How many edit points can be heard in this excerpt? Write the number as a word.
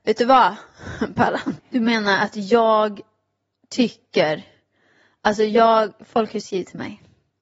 one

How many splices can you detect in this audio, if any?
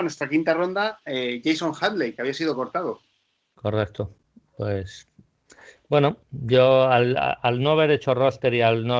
zero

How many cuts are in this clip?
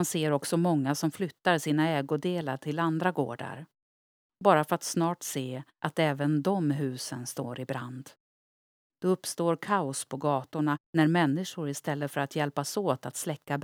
zero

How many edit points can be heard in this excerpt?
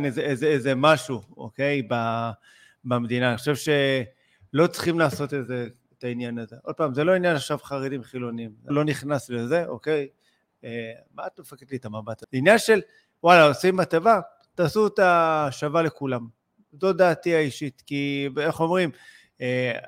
two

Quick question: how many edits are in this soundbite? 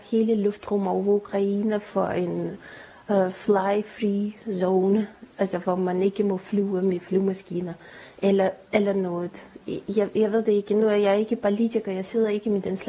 zero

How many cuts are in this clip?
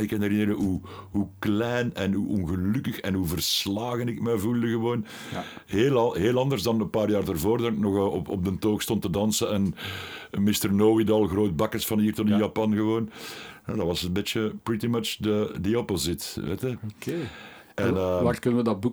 zero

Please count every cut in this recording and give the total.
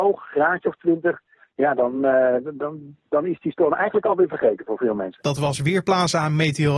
zero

